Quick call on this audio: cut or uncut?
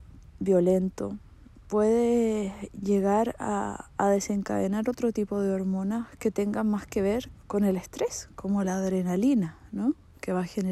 cut